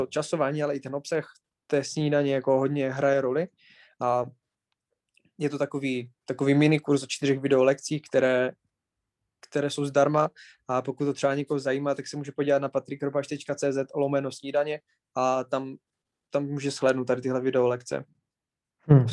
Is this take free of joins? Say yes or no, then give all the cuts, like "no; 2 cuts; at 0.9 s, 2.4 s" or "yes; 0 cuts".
yes; 0 cuts